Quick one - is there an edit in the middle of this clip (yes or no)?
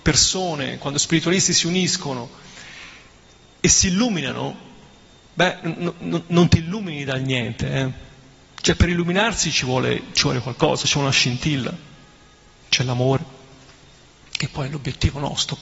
yes